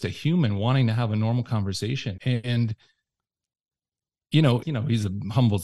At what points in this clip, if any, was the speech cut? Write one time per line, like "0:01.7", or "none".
0:02.2
0:04.6

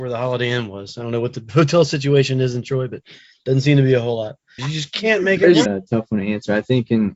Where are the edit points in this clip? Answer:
0:04.6
0:05.7

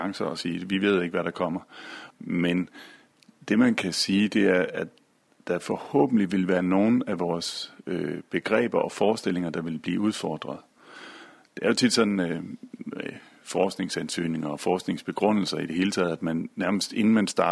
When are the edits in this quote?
0:02.1

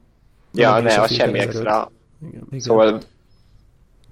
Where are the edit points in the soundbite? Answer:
0:02.5

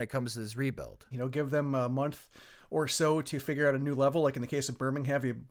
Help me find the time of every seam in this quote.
0:01.1

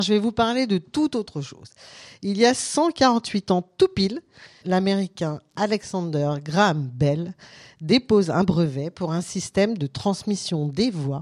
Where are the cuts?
0:04.6

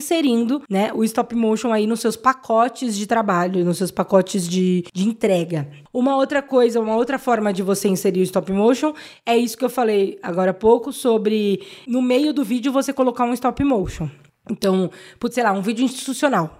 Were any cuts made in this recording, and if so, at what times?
none

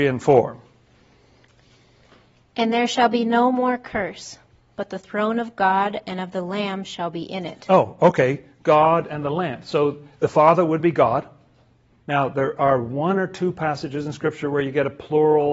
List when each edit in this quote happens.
0:12.0

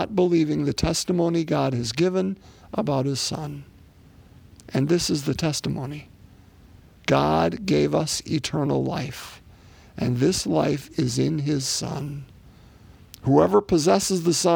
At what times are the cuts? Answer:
none

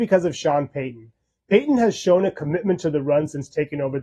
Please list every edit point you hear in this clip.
none

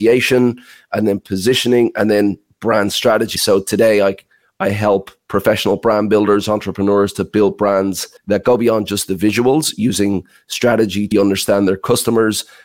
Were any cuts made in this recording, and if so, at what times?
0:03.4
0:08.2
0:11.1

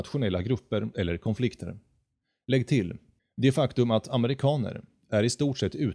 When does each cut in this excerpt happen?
0:03.2

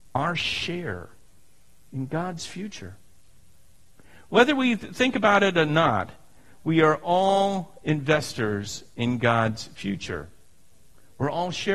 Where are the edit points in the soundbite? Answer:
0:06.6

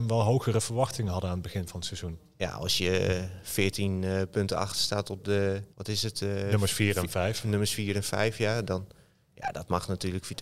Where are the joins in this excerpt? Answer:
0:05.7

